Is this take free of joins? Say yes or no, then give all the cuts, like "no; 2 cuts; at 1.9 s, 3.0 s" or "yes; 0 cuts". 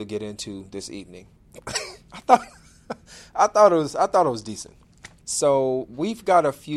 no; 2 cuts; at 1.4 s, 5.2 s